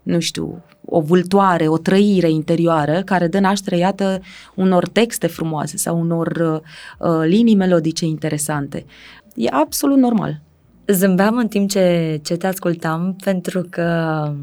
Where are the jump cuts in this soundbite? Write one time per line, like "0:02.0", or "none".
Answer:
0:09.2